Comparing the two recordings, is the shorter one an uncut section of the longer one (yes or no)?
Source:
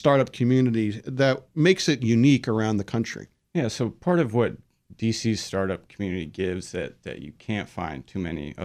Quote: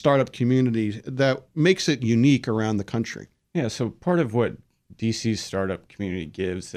yes